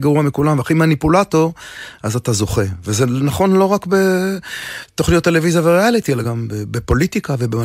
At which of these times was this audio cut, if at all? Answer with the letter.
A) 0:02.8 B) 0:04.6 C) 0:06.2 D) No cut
C